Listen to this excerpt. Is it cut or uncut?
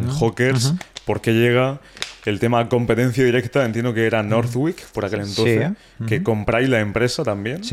uncut